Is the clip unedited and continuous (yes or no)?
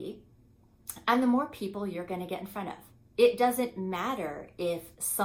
no